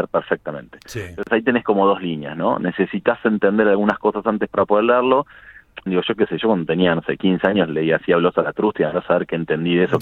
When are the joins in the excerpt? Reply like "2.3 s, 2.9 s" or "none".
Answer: 5.9 s